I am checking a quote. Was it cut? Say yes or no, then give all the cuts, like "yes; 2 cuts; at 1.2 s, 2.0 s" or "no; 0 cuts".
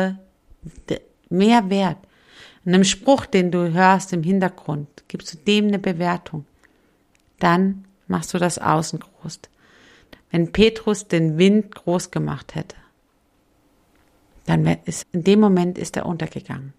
yes; 1 cut; at 15.0 s